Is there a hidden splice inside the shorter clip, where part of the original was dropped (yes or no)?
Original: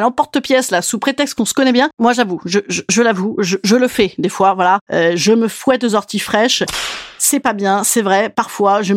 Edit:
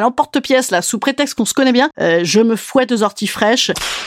yes